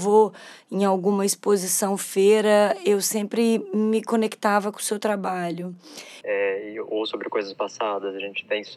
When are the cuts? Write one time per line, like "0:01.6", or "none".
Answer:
0:06.2